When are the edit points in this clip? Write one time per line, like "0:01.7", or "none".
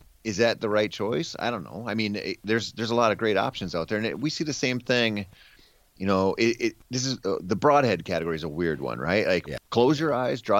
0:09.6

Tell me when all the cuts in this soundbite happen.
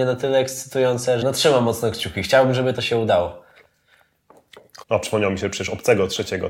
0:01.2
0:04.8

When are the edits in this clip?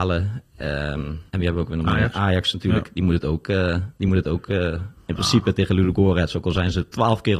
0:01.3

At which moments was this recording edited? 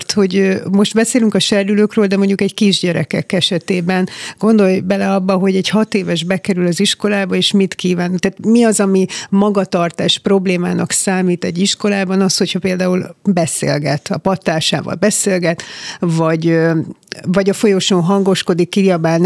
none

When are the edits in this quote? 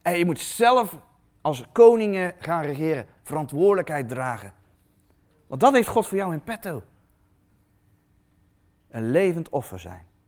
0:03.2
0:08.8

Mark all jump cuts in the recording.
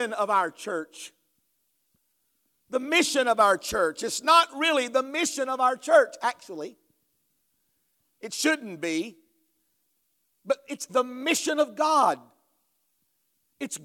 0:10.9

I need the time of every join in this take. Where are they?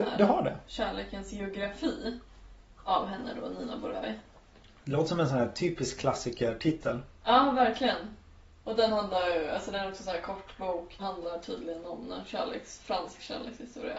0:11.0

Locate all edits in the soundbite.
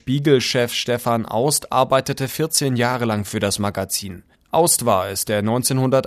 0:04.3

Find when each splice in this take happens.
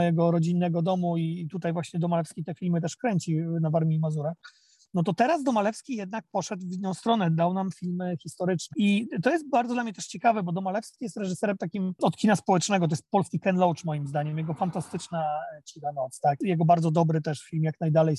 0:08.7

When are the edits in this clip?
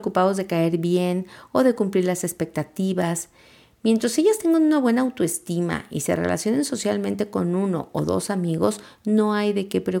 none

